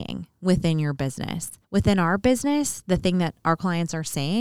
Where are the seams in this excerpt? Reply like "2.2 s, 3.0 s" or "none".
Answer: 1.6 s